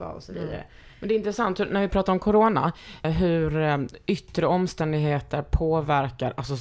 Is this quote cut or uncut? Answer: cut